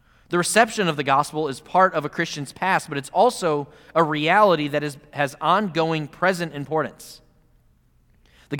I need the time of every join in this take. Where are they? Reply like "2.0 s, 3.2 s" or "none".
none